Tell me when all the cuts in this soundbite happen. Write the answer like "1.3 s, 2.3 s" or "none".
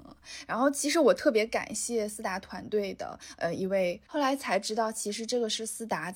4.1 s

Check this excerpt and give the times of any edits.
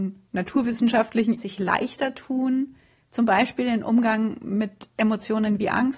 1.4 s

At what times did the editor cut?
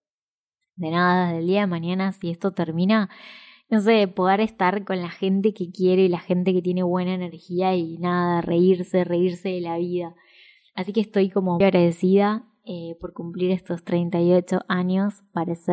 11.6 s

